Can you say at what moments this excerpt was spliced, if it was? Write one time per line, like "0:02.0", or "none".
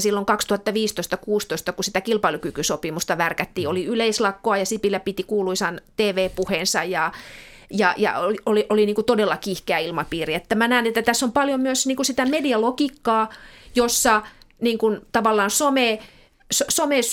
none